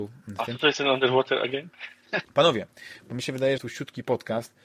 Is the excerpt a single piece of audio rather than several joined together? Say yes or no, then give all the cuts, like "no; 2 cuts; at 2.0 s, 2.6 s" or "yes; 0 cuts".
no; 2 cuts; at 2.2 s, 3.6 s